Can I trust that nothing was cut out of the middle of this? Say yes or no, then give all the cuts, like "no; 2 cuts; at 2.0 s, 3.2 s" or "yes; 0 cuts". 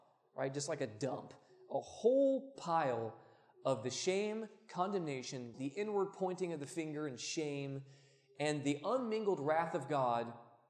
no; 1 cut; at 5.5 s